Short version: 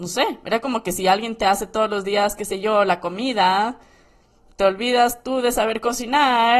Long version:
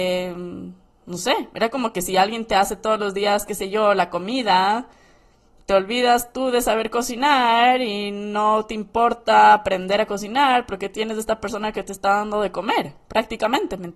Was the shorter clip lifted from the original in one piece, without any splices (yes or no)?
yes